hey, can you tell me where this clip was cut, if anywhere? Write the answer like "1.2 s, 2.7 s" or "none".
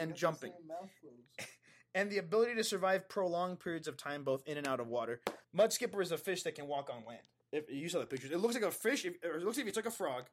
5.4 s, 7.5 s